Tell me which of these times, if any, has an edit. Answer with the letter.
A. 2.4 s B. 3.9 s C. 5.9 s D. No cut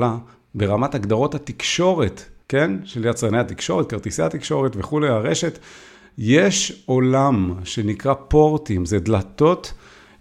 A